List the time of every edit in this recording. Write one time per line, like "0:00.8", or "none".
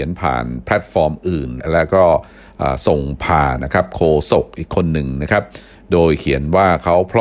0:03.6